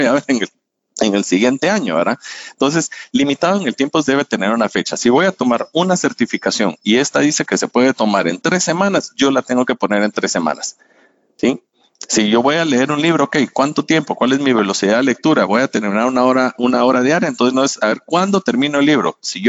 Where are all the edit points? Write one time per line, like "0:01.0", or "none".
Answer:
none